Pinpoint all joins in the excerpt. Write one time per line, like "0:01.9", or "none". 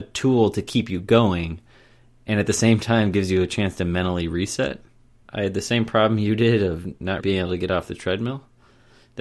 0:05.1
0:07.2